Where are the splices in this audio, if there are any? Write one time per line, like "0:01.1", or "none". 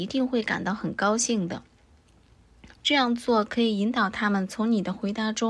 0:02.8